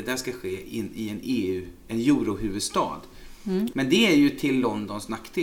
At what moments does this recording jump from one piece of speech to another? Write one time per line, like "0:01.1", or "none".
0:03.7

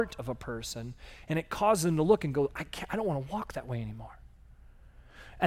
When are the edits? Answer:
none

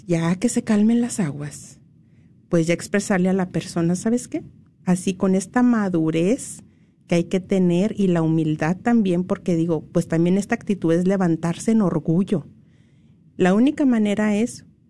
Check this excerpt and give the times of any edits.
0:13.3

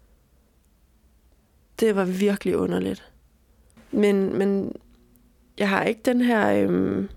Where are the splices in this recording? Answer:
0:03.8

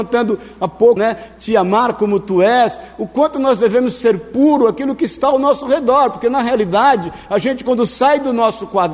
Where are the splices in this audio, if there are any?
0:01.0

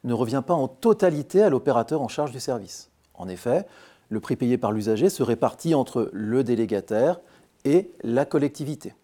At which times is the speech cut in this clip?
none

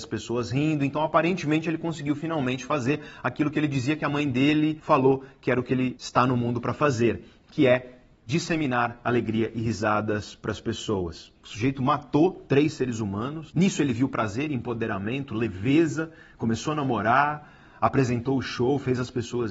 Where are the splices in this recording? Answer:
0:11.4

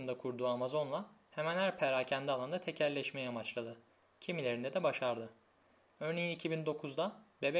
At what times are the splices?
none

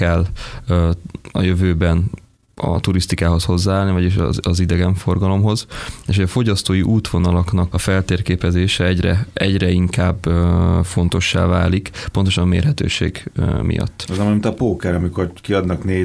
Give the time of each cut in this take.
0:07.7

